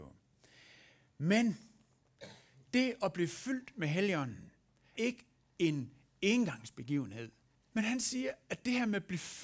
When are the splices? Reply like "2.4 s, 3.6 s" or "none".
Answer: 4.9 s, 7.5 s